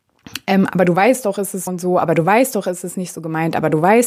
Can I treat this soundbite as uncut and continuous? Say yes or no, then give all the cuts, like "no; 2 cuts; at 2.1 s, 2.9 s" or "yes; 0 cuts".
no; 1 cut; at 1.7 s